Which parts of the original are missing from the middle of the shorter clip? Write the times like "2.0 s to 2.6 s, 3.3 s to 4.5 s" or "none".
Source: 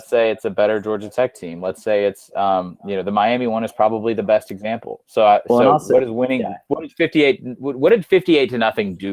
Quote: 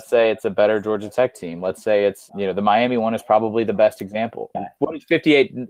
2.3 s to 2.8 s, 5.0 s to 6.4 s